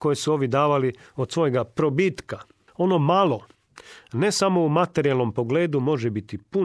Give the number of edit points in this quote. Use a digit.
1